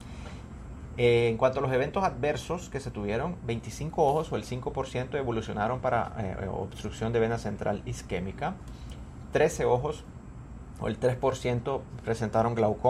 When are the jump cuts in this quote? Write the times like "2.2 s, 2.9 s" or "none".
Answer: none